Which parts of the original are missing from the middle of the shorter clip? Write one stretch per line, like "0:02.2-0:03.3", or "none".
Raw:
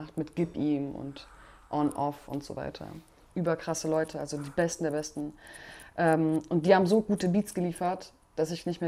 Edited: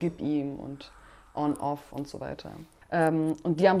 0:03.2-0:05.9